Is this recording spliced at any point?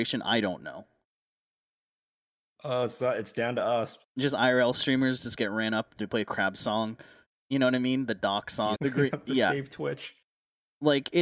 yes; 2 cuts; at 4.0 s, 8.8 s

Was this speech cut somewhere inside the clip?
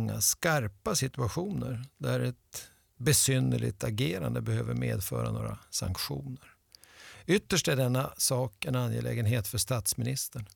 no; 0 cuts

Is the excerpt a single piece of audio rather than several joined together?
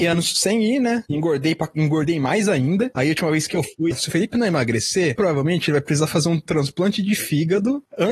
no; 3 cuts; at 3.9 s, 5.2 s, 6.5 s

